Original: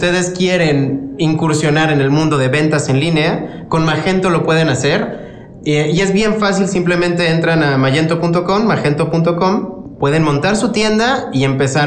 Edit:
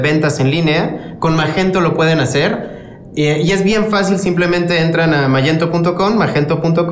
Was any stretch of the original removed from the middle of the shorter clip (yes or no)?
no